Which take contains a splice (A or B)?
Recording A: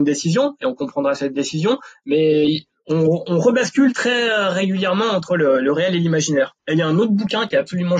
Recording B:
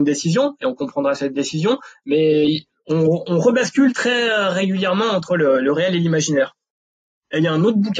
A